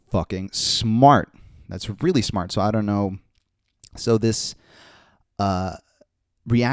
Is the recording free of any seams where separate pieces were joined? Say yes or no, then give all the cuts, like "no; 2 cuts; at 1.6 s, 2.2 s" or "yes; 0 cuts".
yes; 0 cuts